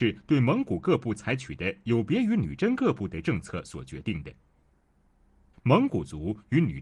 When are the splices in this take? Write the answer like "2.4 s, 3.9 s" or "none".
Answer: 5.5 s